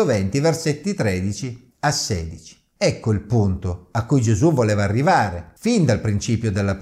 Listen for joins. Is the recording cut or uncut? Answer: uncut